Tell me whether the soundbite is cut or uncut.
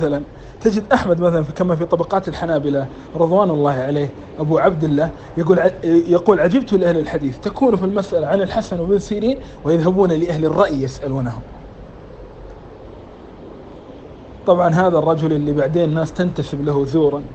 uncut